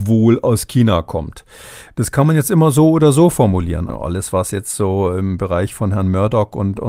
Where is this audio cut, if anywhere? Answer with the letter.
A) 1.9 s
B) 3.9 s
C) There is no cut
B